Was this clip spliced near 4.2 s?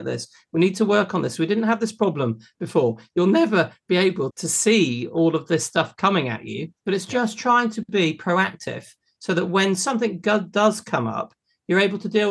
no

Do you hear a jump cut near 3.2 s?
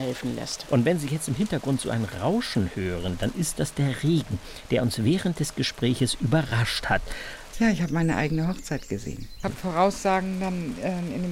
no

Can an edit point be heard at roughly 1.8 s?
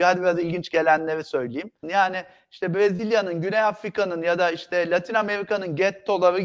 yes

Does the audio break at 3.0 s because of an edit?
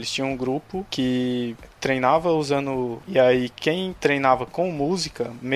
yes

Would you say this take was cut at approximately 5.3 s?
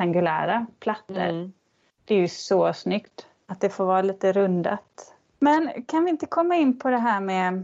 yes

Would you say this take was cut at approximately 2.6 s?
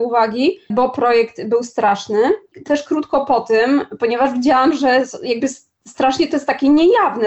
no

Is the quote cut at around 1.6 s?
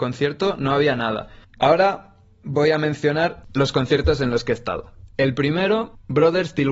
yes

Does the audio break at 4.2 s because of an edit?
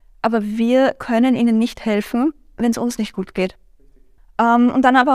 yes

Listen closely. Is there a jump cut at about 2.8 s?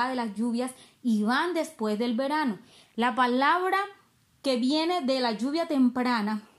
yes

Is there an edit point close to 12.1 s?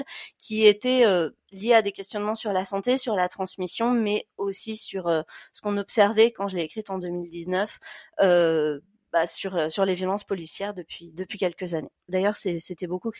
yes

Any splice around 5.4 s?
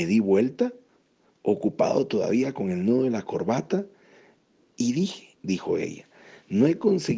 yes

